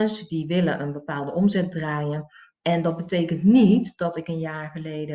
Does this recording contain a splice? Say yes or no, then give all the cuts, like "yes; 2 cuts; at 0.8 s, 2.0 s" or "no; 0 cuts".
yes; 1 cut; at 2.5 s